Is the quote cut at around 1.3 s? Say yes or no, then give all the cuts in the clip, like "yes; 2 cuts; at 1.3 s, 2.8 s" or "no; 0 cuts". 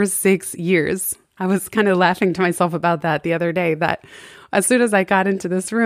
no; 0 cuts